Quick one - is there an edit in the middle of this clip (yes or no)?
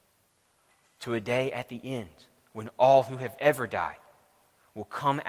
no